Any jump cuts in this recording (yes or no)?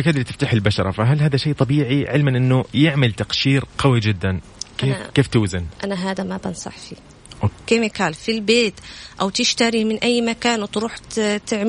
yes